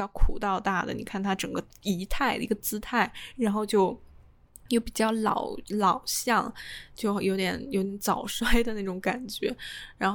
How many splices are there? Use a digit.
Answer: 0